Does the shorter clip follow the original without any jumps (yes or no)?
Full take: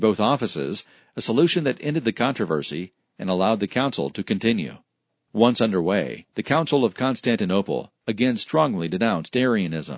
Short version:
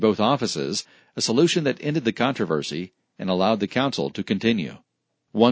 yes